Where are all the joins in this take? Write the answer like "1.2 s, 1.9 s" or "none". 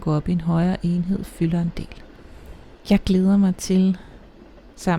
none